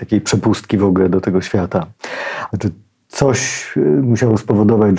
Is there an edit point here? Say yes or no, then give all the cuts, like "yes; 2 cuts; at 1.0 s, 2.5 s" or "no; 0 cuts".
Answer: yes; 1 cut; at 2.5 s